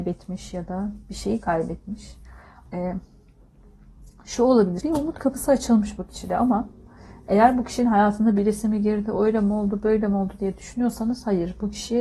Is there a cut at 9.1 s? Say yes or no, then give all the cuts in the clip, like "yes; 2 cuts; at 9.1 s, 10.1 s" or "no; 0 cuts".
no; 2 cuts; at 2.7 s, 4.8 s